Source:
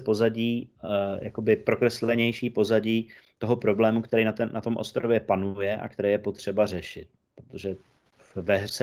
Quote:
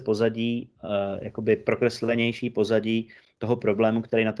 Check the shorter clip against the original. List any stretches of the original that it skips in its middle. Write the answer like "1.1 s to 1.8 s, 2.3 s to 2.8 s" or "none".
none